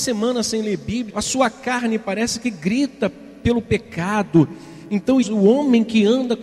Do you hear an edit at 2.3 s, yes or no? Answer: no